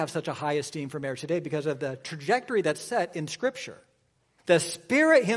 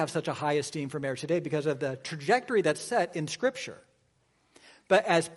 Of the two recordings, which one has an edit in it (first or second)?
first